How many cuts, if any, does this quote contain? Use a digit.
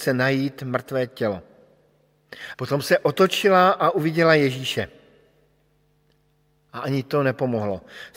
1